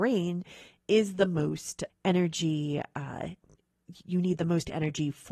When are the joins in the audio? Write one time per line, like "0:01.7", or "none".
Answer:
0:01.9